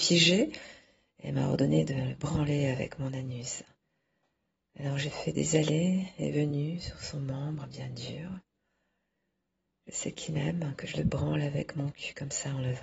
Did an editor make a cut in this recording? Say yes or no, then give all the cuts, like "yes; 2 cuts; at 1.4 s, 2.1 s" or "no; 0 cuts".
no; 0 cuts